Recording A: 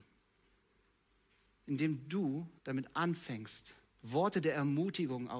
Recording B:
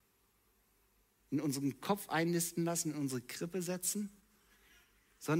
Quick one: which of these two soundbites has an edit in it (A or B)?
A